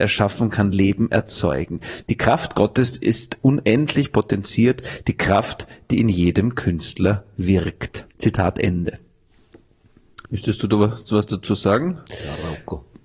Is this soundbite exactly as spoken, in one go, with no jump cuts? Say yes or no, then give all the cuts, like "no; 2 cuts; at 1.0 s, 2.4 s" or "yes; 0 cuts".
no; 3 cuts; at 8.1 s, 10.2 s, 12.0 s